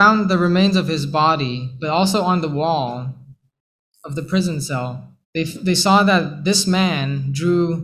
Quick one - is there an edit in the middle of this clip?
yes; 1 cut; at 5.2 s

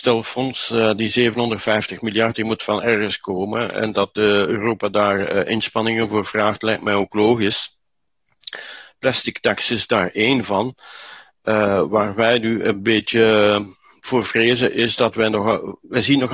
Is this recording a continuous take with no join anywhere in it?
yes; 0 cuts

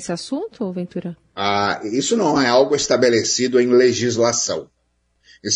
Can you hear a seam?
no; 0 cuts

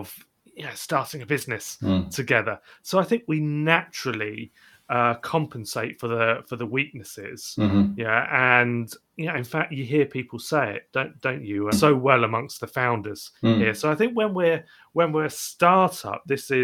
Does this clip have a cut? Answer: yes; 1 cut; at 11.7 s

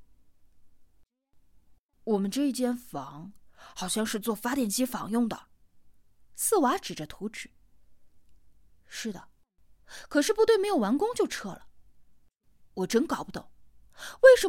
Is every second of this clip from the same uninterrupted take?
yes; 0 cuts

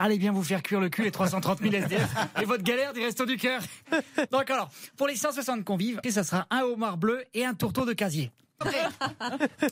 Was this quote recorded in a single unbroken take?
no; 3 cuts; at 4.3 s, 6.0 s, 8.6 s

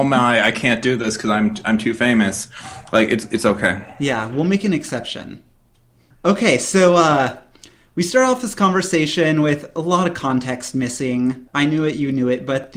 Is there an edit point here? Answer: no; 0 cuts

